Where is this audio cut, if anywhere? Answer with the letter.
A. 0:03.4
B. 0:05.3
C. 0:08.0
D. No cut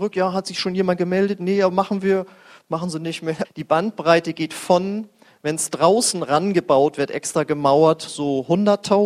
A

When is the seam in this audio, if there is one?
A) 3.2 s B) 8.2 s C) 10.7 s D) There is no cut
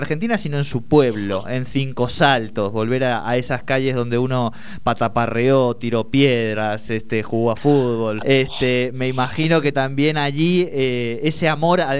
B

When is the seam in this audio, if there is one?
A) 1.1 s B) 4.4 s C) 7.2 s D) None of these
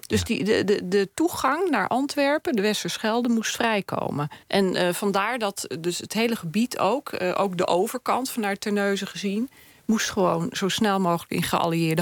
B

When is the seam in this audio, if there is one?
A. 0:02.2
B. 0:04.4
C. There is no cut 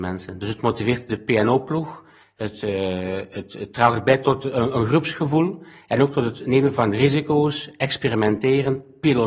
A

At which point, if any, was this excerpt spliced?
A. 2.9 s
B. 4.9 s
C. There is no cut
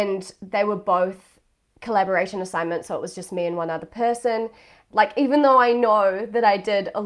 B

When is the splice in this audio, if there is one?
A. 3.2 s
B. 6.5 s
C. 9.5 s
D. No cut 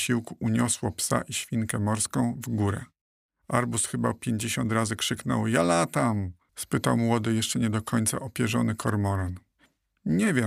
B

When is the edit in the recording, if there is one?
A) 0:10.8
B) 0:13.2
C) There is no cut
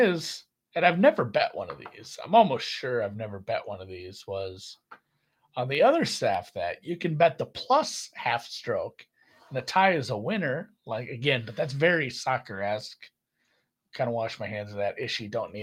C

